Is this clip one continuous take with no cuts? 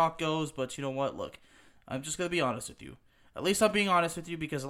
yes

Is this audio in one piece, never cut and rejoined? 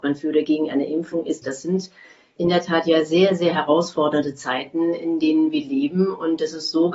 no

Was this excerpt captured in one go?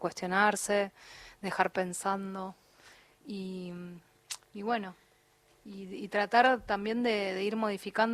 yes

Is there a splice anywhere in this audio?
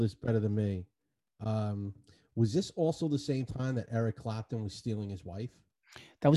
no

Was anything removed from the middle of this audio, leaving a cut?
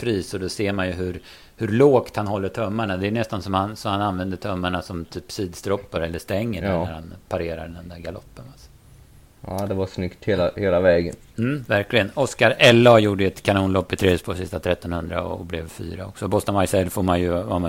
no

